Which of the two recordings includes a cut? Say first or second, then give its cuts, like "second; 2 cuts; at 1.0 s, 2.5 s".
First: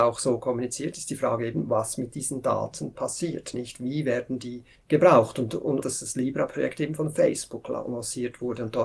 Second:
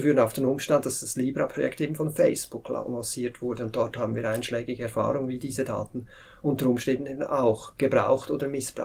first; 2 cuts; at 4.8 s, 5.8 s